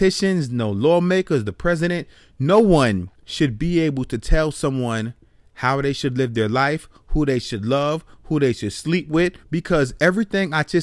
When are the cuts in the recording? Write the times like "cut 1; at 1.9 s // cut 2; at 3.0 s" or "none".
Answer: cut 1; at 3.1 s // cut 2; at 9.4 s

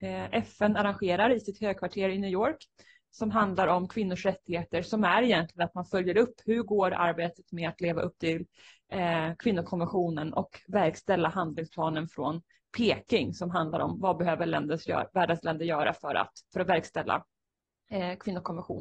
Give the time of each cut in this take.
cut 1; at 16.4 s

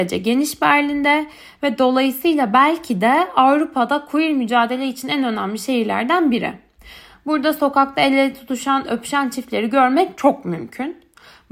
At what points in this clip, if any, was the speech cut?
cut 1; at 10.1 s

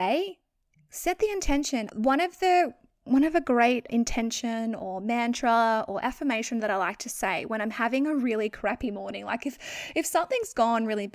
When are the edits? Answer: cut 1; at 1.9 s // cut 2; at 3.9 s

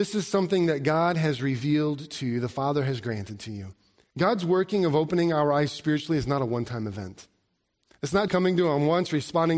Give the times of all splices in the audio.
cut 1; at 4.1 s // cut 2; at 8.3 s

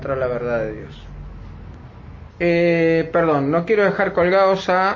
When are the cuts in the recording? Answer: cut 1; at 2.3 s

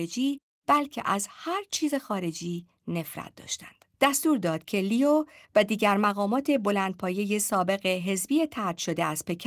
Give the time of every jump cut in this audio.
cut 1; at 3.9 s

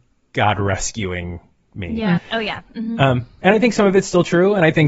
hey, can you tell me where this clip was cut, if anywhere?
cut 1; at 2.2 s

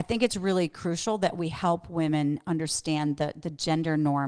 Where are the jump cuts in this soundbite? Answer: none

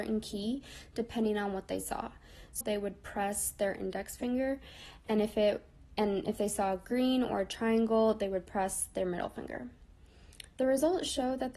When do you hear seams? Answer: cut 1; at 2.6 s

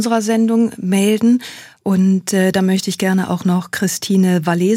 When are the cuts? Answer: none

